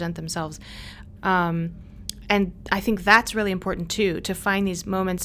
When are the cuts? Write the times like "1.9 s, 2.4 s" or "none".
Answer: 1.2 s